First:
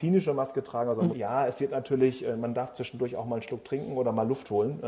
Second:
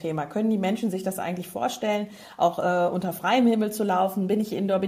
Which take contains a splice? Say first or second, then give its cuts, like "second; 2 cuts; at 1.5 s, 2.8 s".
first; 1 cut; at 1.1 s